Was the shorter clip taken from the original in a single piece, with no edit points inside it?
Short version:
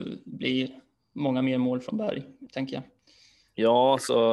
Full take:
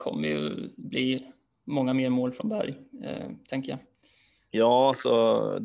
no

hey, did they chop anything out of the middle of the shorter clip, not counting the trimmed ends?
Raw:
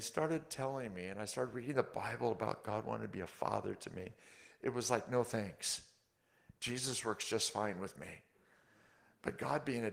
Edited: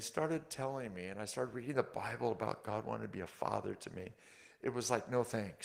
no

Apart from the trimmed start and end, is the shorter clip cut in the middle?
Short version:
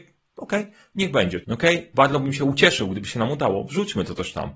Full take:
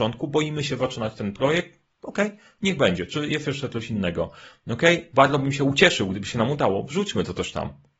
yes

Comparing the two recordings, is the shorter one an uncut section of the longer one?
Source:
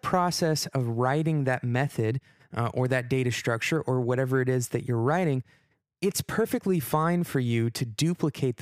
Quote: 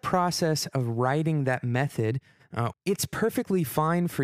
no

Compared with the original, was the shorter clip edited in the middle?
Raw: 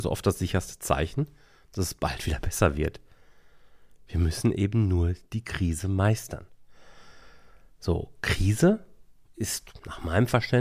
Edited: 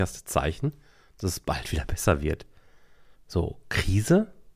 yes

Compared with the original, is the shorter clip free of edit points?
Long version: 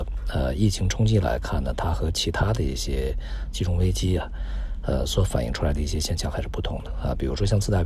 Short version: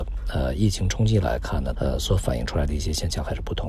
no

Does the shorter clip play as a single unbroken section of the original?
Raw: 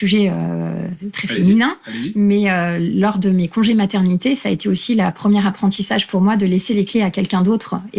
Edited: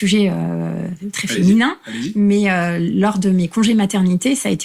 yes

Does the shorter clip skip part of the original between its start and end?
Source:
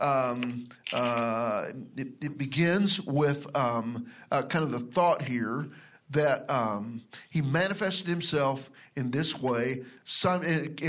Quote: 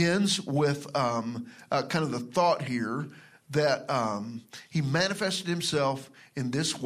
no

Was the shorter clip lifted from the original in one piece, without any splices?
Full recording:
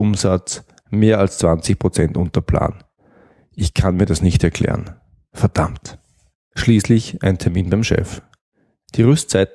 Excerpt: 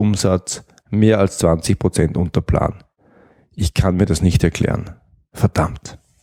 yes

